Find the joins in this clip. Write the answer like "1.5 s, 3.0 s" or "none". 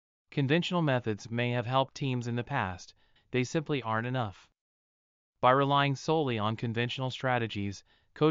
3.2 s